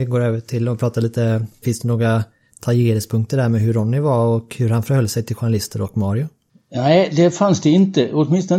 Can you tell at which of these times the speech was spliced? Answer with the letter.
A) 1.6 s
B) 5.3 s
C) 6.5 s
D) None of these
A